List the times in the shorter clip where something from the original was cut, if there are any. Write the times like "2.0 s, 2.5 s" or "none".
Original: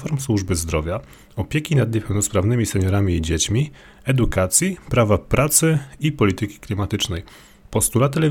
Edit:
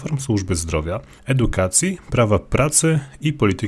1.2 s

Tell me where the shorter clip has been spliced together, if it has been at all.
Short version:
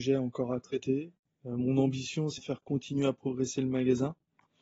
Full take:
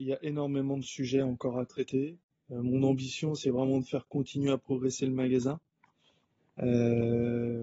2.4 s

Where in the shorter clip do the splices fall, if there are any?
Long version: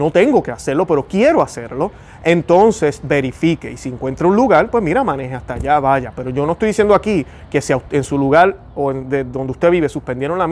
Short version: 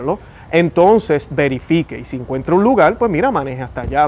none

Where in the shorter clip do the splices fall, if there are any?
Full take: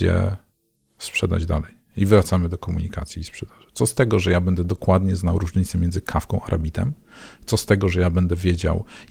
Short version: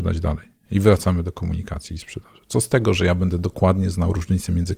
none

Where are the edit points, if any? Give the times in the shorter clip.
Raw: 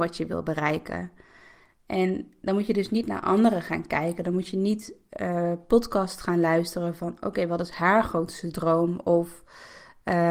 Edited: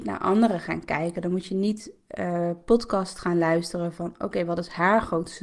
none

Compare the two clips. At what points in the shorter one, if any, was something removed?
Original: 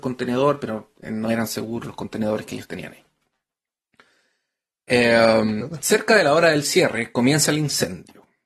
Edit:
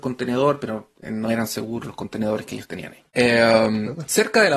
3.1 s

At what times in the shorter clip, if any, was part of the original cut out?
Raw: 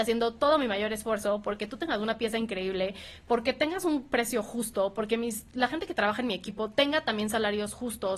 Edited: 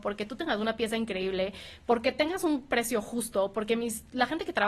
none

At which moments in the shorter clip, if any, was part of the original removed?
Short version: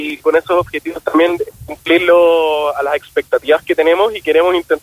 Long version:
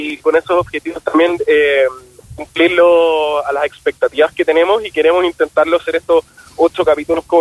1.5 s

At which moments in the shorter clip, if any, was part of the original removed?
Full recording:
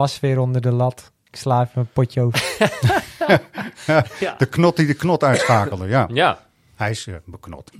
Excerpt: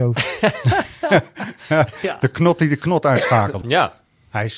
3.6 s

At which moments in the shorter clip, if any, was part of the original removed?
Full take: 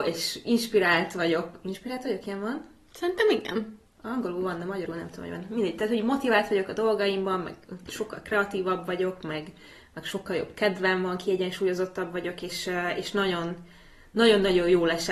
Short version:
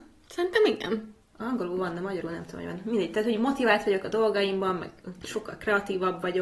none

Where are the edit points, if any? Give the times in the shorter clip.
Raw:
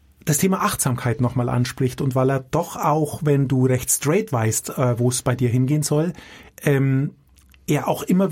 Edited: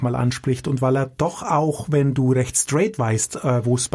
none

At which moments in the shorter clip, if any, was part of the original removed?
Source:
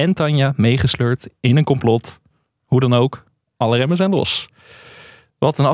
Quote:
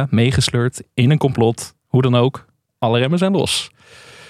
1.8 s

